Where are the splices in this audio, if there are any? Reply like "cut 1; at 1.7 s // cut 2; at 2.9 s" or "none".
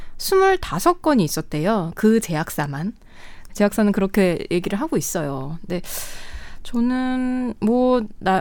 cut 1; at 3.5 s